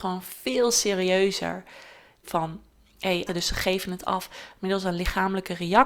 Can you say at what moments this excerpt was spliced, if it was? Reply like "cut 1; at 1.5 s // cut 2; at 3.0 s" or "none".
cut 1; at 2.2 s // cut 2; at 3.3 s